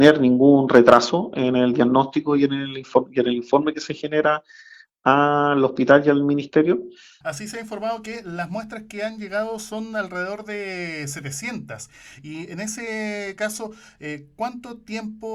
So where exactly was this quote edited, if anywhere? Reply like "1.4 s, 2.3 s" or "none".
7.2 s